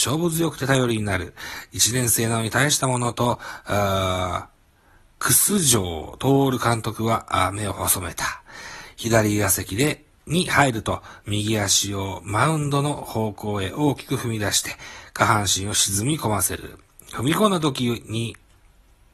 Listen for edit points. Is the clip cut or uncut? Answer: cut